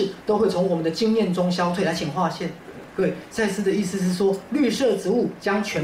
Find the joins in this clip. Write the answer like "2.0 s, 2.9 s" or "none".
none